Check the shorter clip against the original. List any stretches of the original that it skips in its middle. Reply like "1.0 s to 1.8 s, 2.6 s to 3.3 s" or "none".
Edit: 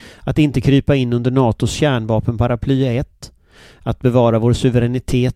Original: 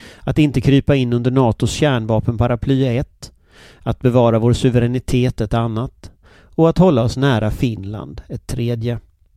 none